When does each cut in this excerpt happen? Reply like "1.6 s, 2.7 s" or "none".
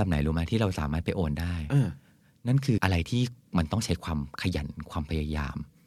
2.8 s